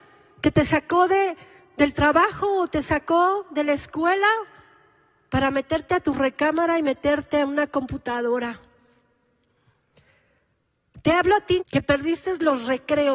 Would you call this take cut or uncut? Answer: cut